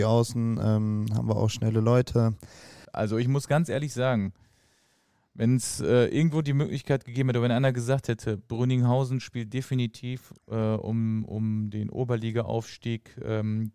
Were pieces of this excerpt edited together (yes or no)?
yes